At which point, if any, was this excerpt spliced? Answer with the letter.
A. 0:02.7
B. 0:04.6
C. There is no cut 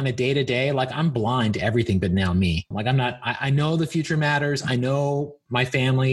A